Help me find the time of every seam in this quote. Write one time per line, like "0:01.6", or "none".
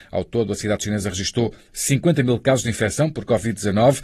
none